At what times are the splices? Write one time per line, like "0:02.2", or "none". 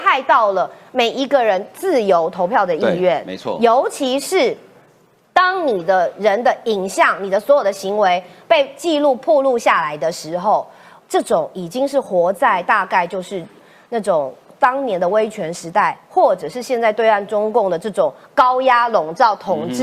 none